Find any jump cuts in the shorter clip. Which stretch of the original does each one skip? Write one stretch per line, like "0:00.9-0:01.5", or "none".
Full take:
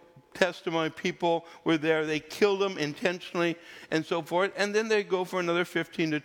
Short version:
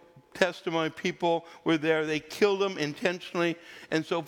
none